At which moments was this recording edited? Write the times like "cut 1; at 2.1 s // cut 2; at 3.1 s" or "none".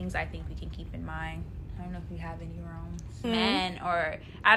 cut 1; at 3.2 s

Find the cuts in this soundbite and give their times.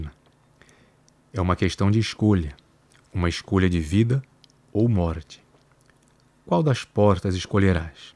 none

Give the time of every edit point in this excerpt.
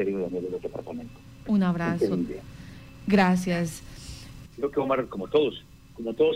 cut 1; at 4.4 s

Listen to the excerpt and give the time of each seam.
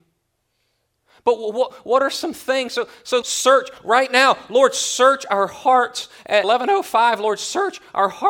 cut 1; at 3.2 s

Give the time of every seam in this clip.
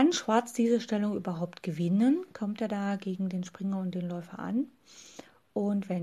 none

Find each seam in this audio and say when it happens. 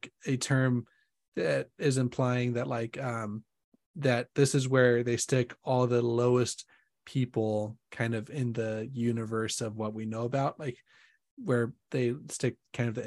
none

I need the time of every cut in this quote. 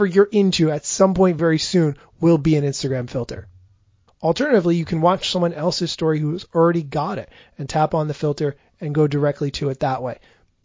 cut 1; at 1.4 s // cut 2; at 4.1 s

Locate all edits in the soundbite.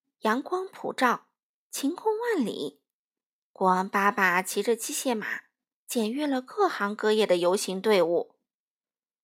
none

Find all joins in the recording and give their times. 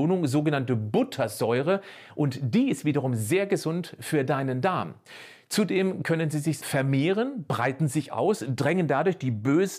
cut 1; at 6.6 s // cut 2; at 8.1 s

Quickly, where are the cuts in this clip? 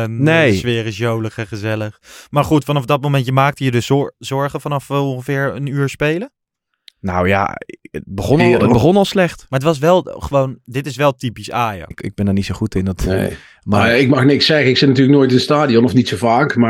cut 1; at 11.9 s

